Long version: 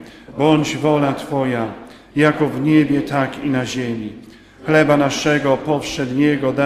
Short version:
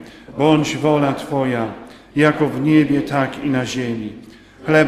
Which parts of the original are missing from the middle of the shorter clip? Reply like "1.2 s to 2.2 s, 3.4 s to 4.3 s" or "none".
none